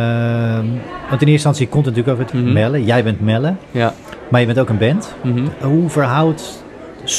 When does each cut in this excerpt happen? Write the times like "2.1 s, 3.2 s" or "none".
2.3 s